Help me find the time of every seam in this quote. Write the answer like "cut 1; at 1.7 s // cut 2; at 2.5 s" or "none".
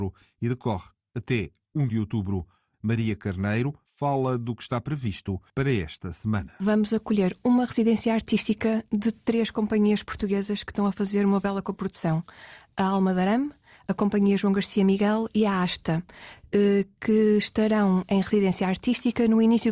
cut 1; at 3.8 s // cut 2; at 5.5 s